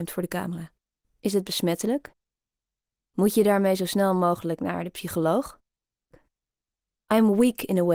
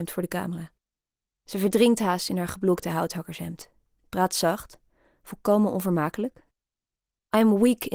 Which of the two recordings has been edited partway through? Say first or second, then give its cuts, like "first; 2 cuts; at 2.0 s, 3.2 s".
first; 2 cuts; at 1.0 s, 6.1 s